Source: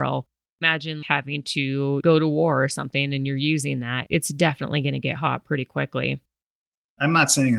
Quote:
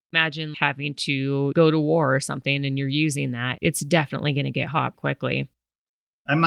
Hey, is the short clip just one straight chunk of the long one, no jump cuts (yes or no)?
no